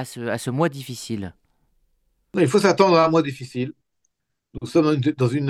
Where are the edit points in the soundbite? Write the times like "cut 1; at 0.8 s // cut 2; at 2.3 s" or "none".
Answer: none